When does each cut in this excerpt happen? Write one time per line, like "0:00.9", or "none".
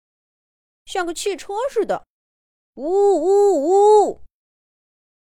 none